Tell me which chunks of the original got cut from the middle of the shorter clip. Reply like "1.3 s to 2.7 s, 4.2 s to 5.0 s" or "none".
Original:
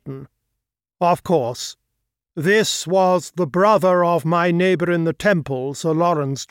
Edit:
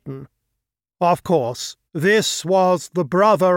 1.9 s to 2.3 s